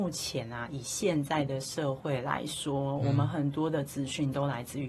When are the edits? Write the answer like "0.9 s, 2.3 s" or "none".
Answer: none